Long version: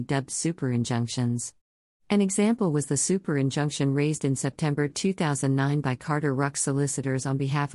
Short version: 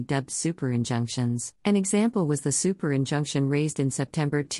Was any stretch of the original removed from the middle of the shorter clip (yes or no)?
yes